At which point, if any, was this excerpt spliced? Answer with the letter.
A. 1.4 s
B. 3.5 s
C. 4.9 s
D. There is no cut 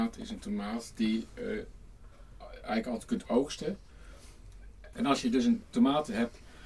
C